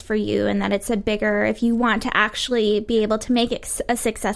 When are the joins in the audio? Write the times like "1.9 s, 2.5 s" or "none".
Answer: none